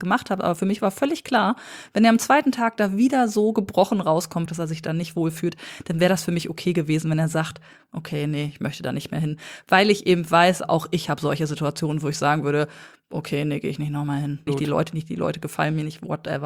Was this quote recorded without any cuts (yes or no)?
no